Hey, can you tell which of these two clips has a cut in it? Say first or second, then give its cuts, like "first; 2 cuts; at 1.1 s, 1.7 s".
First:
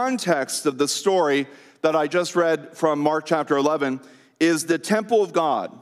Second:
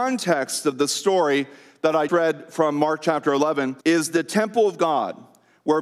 second; 2 cuts; at 2.1 s, 3.8 s